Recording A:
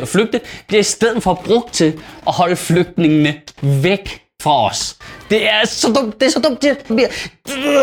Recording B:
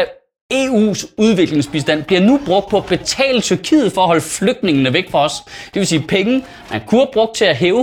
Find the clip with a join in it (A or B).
A